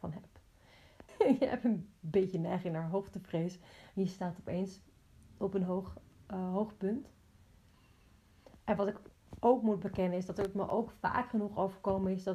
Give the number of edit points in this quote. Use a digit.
1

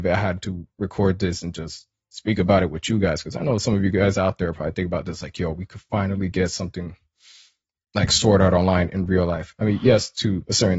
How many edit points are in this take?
0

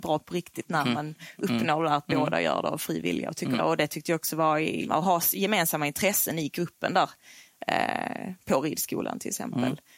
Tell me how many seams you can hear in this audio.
2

